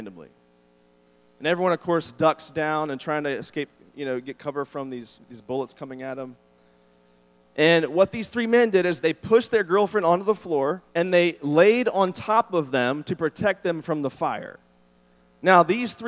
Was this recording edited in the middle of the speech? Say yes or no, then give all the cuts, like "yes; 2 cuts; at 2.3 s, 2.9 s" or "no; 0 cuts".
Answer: yes; 3 cuts; at 7.4 s, 9.0 s, 10.9 s